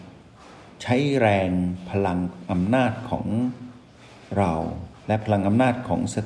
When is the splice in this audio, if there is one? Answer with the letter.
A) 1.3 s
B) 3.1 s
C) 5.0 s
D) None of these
C